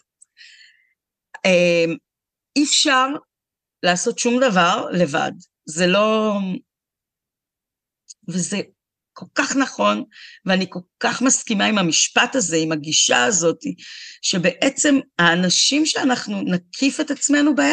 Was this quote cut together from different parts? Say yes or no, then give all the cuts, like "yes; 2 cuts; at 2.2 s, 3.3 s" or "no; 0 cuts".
yes; 1 cut; at 8.2 s